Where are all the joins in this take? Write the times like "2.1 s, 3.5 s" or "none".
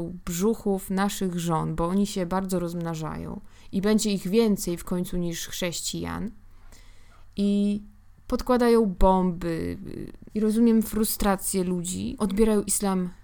10.3 s, 12.2 s